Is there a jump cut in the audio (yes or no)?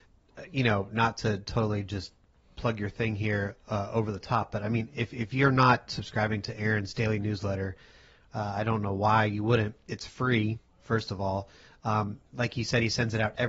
no